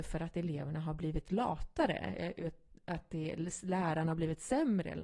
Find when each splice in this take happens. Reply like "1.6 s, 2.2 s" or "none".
none